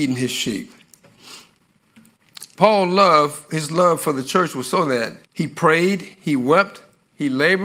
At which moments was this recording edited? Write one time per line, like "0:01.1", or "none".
0:02.5
0:05.2